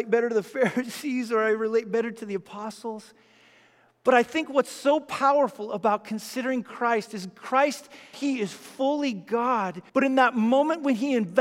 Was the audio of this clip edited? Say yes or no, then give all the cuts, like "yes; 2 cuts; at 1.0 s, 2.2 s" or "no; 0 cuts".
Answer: yes; 2 cuts; at 8.1 s, 9.9 s